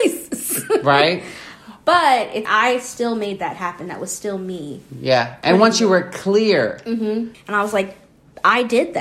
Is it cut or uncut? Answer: cut